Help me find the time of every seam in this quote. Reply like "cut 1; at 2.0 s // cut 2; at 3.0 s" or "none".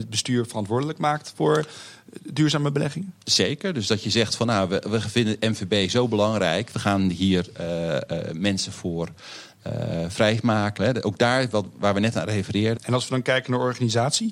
cut 1; at 10.8 s // cut 2; at 12.8 s